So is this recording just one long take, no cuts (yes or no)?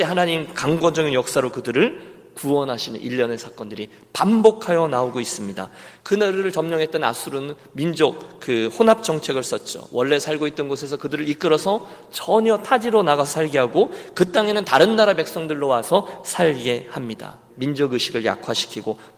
no